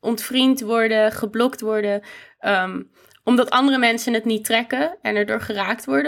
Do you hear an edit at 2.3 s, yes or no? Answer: no